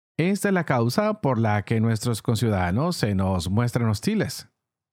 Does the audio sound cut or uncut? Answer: uncut